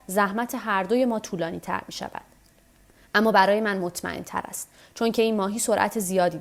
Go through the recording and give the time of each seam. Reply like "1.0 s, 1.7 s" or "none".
none